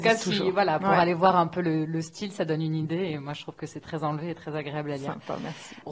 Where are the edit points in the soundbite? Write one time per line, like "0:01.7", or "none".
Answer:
none